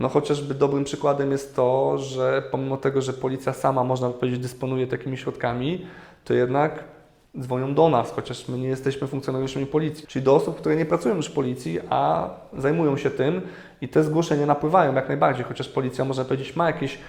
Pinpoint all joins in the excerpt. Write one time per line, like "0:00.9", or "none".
0:10.0